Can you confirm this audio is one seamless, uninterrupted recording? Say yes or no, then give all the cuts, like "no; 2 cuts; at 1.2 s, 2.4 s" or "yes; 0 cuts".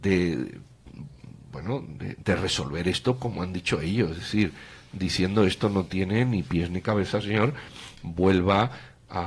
yes; 0 cuts